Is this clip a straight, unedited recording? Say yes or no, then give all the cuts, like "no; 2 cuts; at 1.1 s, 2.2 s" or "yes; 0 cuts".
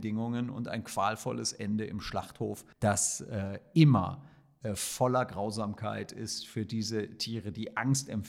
no; 1 cut; at 2.7 s